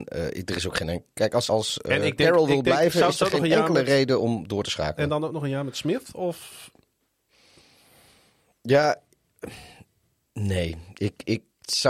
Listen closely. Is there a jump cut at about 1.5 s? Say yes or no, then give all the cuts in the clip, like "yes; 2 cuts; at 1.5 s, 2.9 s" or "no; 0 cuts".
yes; 1 cut; at 1.5 s